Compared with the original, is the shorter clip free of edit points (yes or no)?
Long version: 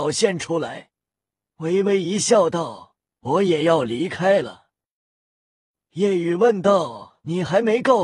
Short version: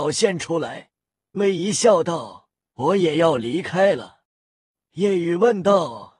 no